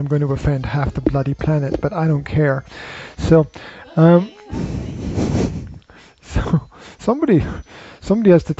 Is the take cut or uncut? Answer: uncut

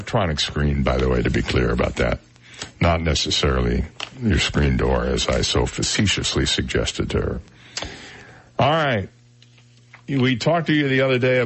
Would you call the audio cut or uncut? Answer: uncut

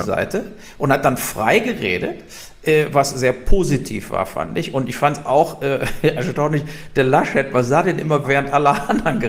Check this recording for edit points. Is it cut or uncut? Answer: cut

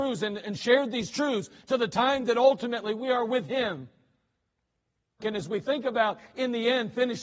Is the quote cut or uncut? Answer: cut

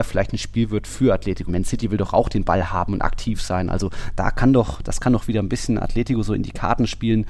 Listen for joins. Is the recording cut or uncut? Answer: cut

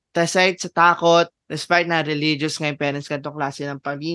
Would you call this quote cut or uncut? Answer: cut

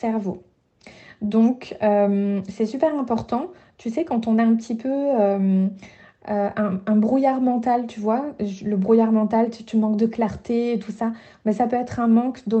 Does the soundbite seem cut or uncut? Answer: uncut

